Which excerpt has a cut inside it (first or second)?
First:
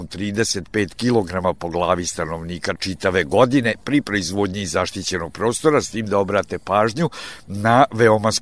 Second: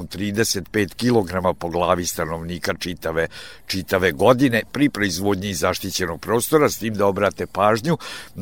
first